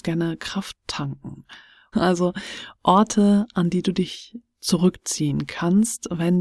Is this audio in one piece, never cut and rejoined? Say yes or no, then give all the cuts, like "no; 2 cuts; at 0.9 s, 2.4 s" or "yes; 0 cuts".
no; 1 cut; at 1.9 s